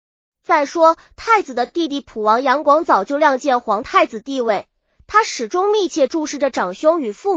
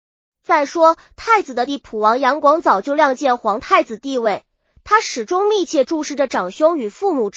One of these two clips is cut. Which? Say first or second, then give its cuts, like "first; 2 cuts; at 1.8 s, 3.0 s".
second; 1 cut; at 1.7 s